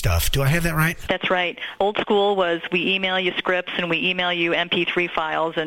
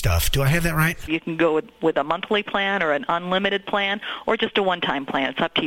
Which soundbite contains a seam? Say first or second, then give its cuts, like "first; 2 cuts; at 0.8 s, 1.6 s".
second; 1 cut; at 1.1 s